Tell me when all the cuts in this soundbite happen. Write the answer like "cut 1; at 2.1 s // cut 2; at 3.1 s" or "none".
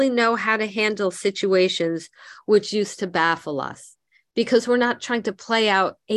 none

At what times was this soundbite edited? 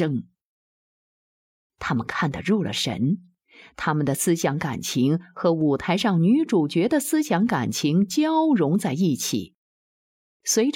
cut 1; at 1.7 s

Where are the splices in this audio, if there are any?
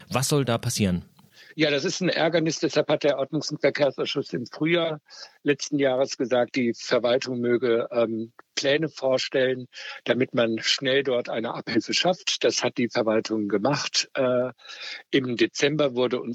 none

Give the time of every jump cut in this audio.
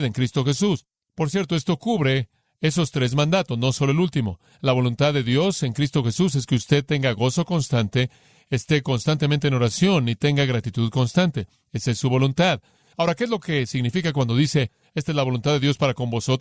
none

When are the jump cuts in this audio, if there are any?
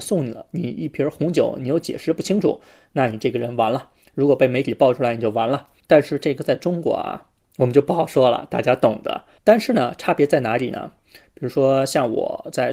cut 1; at 9.4 s // cut 2; at 11.2 s

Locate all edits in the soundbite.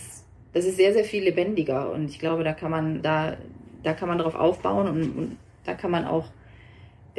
cut 1; at 3.0 s

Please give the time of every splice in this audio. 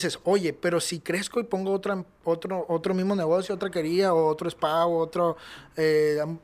none

